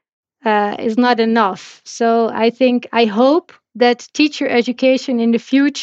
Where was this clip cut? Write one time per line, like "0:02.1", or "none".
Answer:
none